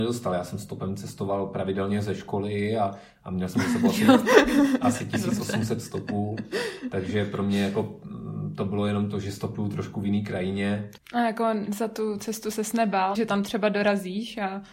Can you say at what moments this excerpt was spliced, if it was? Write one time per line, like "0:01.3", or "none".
0:11.0
0:13.1